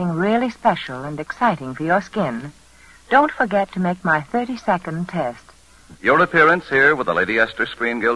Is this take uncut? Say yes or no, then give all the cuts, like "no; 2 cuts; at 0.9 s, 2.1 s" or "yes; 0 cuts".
no; 1 cut; at 5.9 s